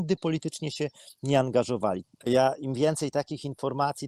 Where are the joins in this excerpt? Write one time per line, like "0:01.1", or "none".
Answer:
0:02.0